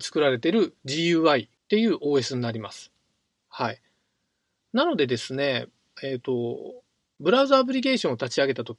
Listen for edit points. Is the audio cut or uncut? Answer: uncut